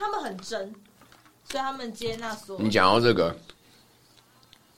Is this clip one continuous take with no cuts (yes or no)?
yes